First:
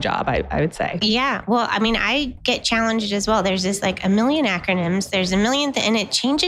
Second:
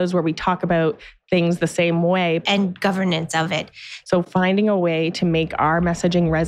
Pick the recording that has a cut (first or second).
second